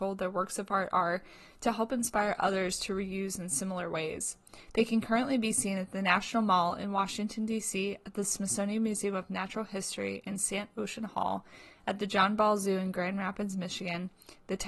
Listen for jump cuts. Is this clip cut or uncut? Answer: uncut